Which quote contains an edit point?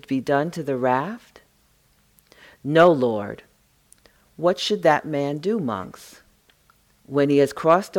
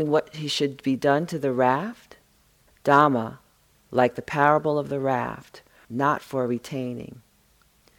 second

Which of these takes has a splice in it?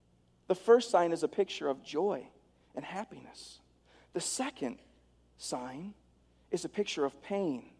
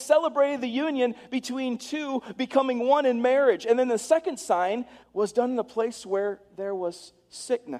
second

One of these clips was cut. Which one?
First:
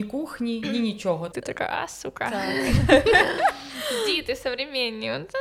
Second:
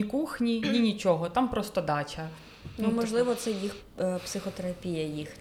first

